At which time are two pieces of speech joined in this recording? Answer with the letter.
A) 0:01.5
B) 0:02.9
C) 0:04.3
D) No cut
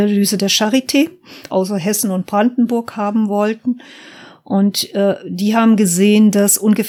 A